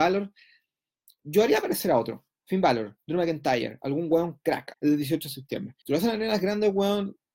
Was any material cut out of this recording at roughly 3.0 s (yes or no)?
no